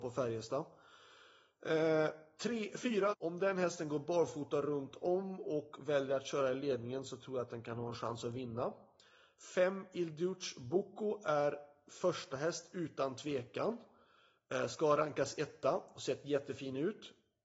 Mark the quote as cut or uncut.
cut